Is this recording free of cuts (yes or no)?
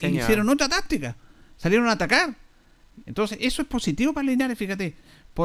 no